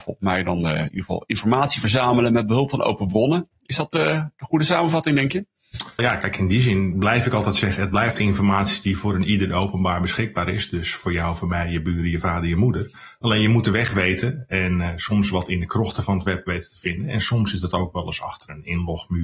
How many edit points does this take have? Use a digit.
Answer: 1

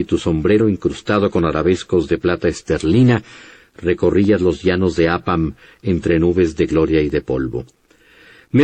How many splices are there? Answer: 0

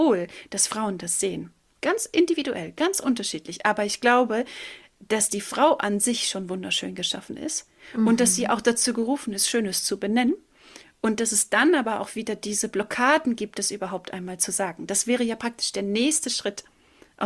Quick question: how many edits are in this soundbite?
1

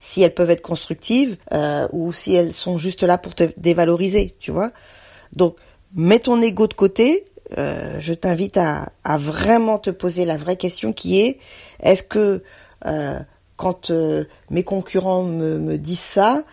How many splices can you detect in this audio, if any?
1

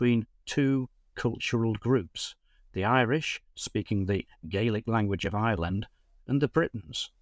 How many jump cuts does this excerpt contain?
0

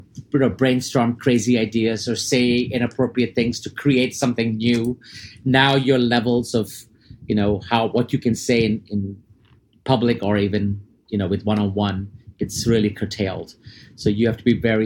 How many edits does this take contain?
0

